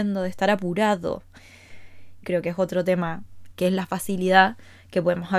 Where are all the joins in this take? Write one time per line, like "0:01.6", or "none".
0:02.2
0:03.5